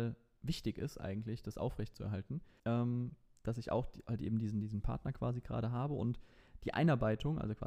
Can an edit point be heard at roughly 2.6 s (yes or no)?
yes